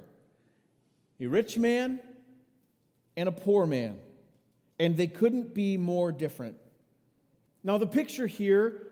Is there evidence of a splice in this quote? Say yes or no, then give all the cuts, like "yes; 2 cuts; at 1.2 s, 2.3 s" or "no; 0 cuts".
yes; 1 cut; at 7.5 s